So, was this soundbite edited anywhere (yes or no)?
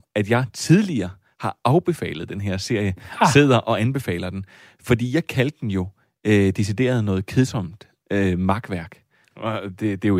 yes